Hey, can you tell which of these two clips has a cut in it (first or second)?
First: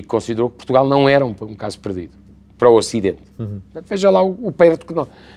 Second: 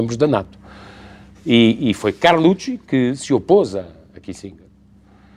second